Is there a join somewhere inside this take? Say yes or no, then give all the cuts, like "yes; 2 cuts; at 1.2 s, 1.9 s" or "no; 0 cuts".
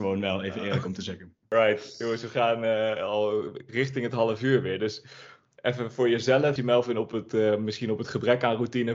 yes; 2 cuts; at 1.4 s, 6.6 s